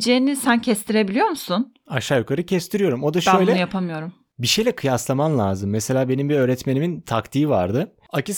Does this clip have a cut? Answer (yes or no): no